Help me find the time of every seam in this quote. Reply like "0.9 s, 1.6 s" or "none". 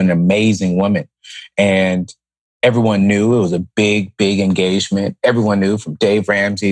none